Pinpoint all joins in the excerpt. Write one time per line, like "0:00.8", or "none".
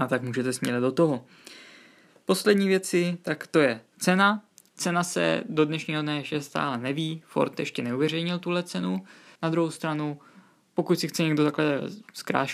0:09.3